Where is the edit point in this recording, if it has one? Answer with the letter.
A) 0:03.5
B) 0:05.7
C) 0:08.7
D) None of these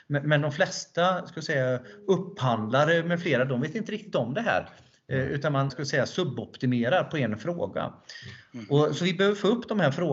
B